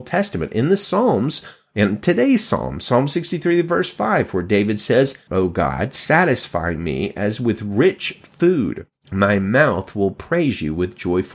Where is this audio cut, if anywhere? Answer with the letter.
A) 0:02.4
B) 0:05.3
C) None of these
B